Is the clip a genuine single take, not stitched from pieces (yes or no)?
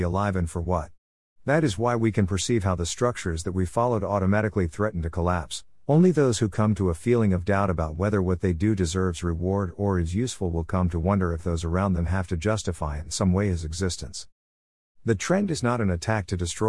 yes